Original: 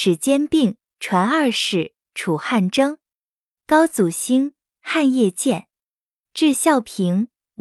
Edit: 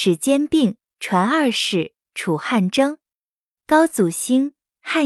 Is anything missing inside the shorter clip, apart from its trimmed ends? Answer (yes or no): no